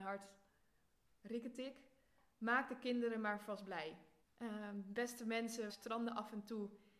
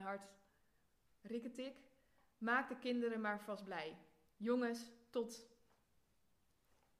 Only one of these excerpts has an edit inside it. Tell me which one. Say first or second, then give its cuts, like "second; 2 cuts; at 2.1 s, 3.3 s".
first; 2 cuts; at 4.2 s, 5.7 s